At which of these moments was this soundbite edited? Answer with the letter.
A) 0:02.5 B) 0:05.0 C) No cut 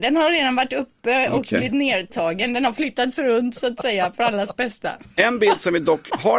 C